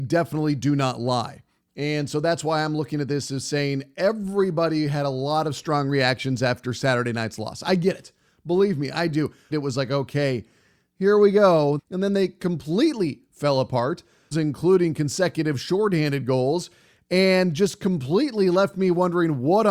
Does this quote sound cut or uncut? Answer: cut